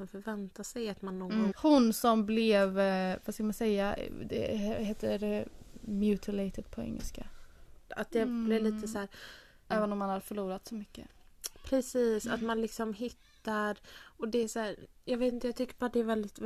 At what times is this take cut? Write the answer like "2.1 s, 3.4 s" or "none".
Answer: 1.5 s, 7.9 s, 9.7 s